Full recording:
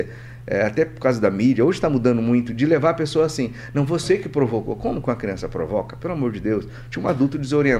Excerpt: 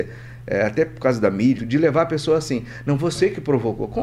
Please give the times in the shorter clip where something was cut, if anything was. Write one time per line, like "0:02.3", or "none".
0:01.6